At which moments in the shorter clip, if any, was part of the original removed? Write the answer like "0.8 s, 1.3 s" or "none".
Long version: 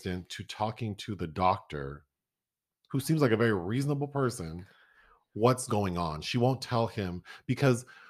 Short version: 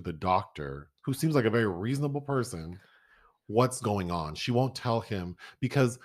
1.0 s